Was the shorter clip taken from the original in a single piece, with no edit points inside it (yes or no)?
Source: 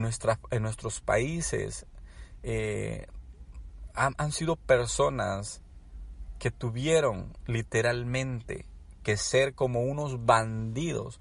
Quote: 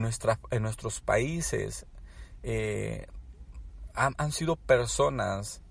yes